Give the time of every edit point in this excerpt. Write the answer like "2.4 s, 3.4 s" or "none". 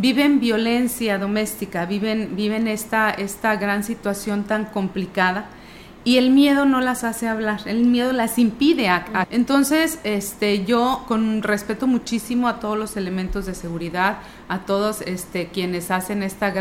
9.2 s